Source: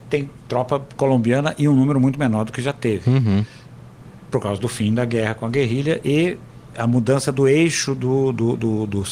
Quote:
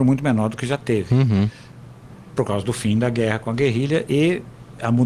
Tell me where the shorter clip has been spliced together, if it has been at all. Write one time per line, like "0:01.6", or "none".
none